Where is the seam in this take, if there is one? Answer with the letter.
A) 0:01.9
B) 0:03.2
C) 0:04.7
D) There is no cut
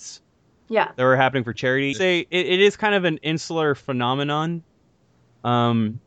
A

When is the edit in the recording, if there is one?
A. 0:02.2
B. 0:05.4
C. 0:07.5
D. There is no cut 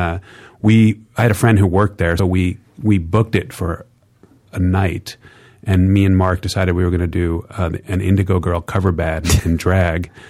A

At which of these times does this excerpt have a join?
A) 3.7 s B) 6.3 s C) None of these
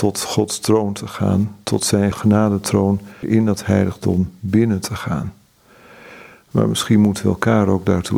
B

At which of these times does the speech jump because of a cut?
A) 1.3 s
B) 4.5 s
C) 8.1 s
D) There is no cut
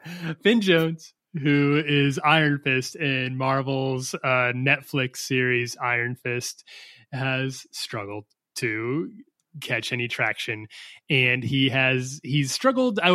D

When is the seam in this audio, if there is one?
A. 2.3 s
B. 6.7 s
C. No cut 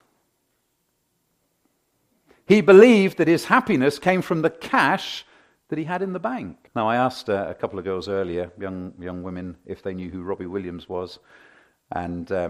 B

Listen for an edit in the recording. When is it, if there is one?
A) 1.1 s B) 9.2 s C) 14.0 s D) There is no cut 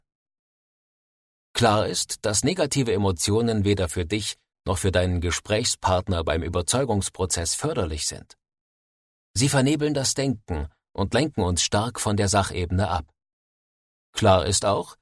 D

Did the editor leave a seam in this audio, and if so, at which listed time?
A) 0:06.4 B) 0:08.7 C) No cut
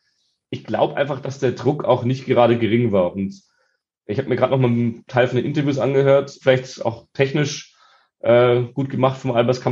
A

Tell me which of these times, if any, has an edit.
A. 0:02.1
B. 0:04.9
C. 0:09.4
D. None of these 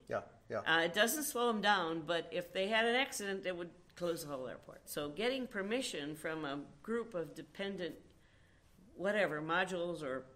B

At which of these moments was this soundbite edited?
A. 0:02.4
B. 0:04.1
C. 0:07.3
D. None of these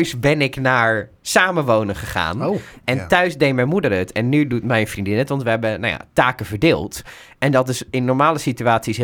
D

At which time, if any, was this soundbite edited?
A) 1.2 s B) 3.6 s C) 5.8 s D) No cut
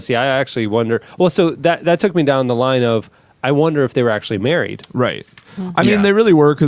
D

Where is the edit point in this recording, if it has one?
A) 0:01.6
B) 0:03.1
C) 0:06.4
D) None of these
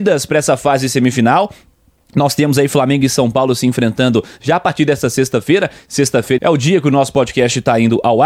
C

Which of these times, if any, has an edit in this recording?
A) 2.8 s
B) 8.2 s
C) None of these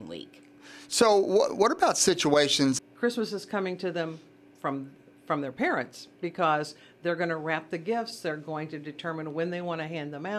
A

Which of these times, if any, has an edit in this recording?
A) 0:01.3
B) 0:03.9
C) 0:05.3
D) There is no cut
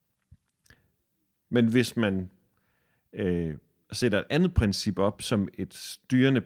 A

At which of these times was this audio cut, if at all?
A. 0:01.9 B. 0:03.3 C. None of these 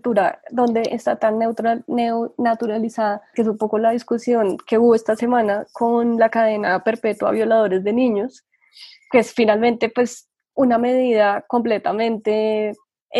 B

